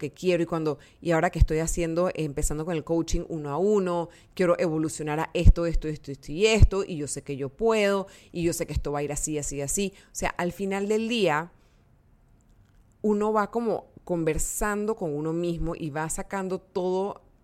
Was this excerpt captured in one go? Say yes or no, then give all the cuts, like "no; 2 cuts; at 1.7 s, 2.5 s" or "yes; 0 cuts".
yes; 0 cuts